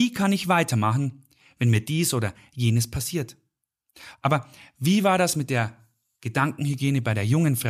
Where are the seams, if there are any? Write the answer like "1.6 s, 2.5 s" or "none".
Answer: 4.1 s